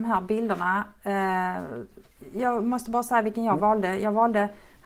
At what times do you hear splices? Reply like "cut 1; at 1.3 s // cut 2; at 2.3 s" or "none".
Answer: none